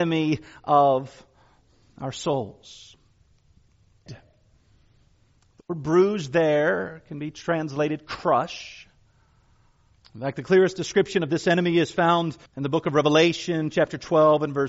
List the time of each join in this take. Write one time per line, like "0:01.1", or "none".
0:04.1
0:10.0
0:12.5